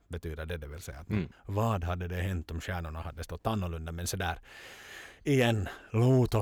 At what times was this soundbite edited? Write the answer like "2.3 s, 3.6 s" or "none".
1.3 s